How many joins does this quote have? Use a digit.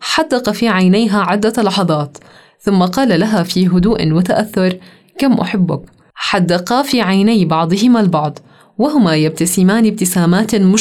0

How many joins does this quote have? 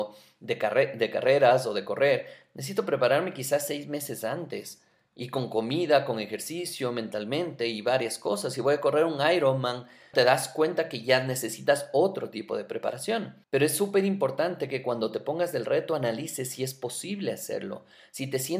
2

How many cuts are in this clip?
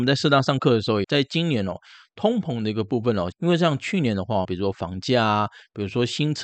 3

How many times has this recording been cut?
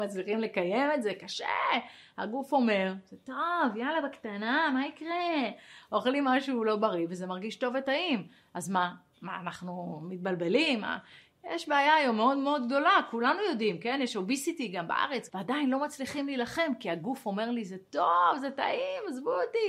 1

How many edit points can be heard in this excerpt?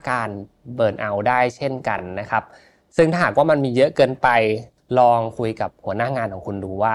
0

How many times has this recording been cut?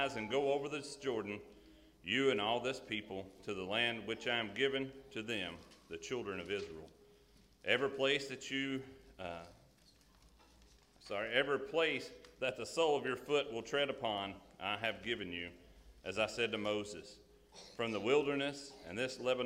0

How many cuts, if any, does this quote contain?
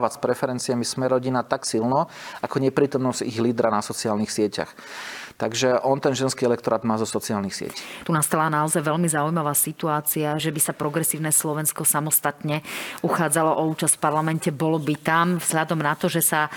2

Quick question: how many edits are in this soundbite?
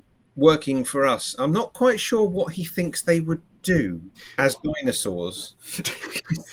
1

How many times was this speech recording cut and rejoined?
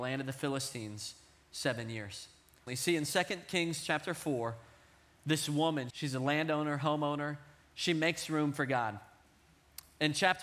2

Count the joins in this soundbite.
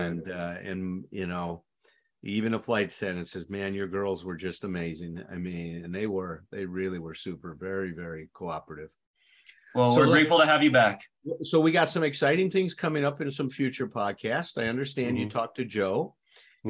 0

